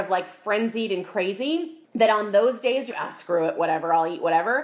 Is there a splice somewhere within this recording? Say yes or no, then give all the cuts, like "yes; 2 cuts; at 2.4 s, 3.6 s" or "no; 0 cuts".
yes; 2 cuts; at 1.8 s, 2.9 s